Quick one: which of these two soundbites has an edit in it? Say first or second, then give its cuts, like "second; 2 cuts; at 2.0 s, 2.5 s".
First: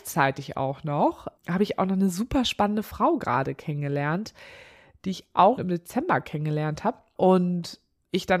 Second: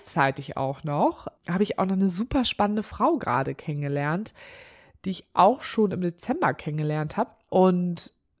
first; 1 cut; at 5.6 s